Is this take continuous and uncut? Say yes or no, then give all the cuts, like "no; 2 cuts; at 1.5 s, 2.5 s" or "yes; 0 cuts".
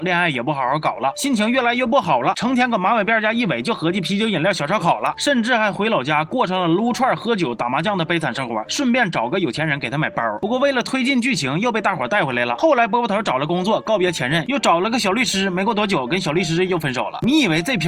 yes; 0 cuts